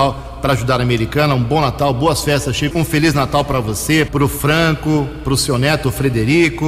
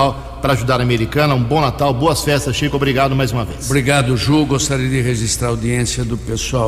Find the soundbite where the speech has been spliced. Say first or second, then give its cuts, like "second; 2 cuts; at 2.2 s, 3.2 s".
first; 2 cuts; at 2.7 s, 4.1 s